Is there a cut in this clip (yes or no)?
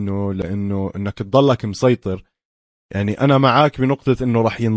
no